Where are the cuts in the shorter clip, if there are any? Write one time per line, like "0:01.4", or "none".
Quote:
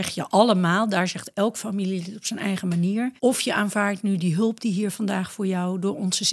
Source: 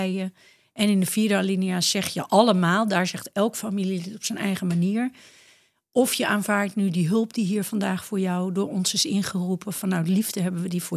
0:03.2